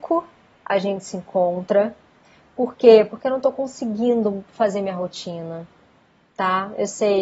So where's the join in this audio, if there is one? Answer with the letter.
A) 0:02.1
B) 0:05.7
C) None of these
C